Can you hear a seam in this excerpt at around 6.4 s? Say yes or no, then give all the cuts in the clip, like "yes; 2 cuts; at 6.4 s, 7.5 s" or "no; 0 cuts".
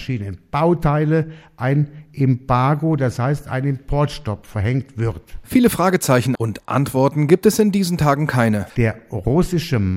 yes; 2 cuts; at 6.4 s, 8.7 s